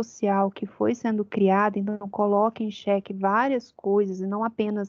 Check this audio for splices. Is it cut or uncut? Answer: uncut